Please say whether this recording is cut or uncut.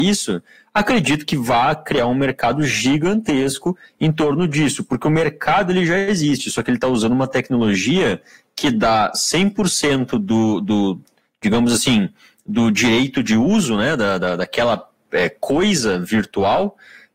uncut